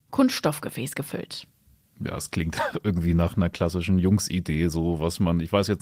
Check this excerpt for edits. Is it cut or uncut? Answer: uncut